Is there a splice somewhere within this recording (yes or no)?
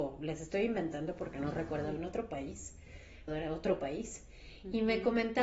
yes